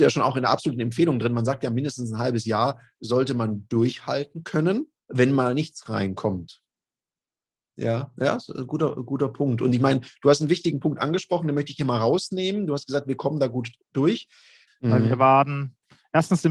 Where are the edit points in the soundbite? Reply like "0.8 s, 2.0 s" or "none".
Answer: 5.0 s, 7.7 s, 14.7 s